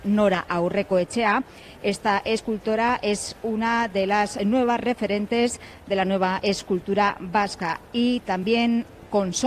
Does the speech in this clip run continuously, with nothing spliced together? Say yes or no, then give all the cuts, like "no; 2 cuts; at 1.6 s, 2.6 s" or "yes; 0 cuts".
yes; 0 cuts